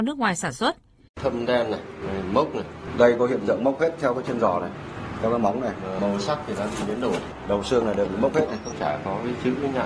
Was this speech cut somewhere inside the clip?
yes; 1 cut; at 1.1 s

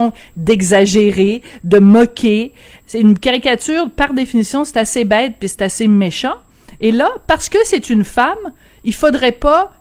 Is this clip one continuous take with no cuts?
yes; 0 cuts

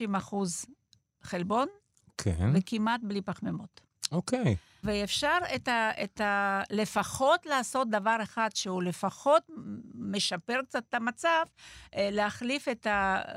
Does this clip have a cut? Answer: yes; 1 cut; at 4.8 s

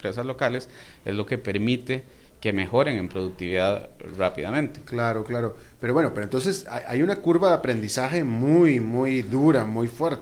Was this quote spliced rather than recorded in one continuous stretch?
no; 0 cuts

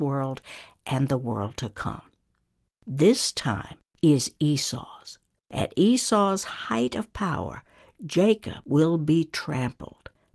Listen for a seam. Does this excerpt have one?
yes; 1 cut; at 5.4 s

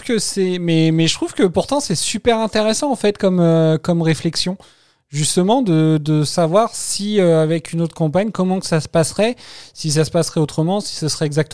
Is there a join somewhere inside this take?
no; 0 cuts

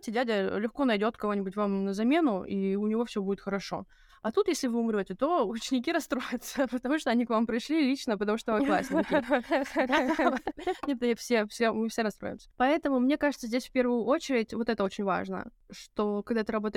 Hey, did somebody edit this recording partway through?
yes; 1 cut; at 12.5 s

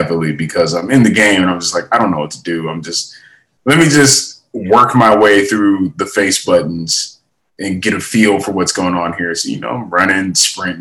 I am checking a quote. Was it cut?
no; 0 cuts

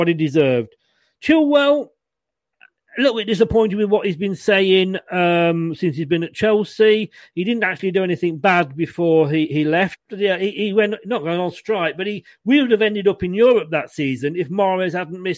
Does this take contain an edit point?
yes; 1 cut; at 10.0 s

